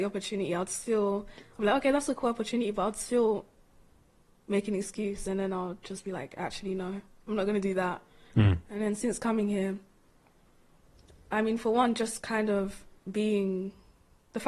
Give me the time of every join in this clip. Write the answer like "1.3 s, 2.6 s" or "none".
none

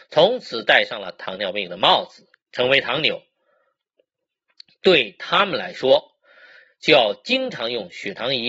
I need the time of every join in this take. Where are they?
none

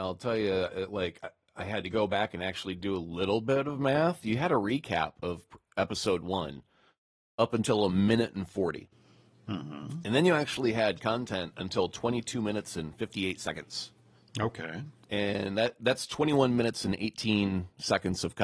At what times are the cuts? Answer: none

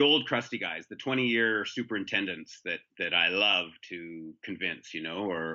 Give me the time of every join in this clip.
2.9 s

